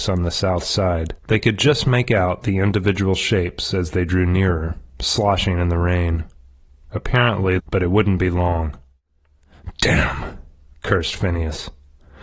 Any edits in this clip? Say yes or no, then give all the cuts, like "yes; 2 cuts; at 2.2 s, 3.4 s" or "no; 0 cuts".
yes; 2 cuts; at 1.2 s, 7.6 s